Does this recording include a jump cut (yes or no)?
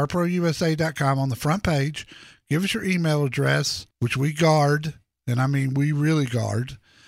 yes